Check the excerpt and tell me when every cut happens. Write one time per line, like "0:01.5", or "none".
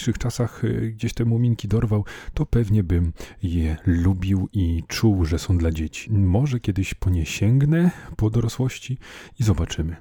0:06.1